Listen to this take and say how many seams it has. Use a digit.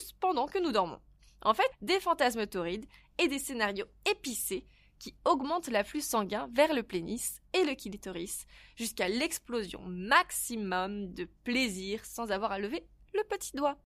1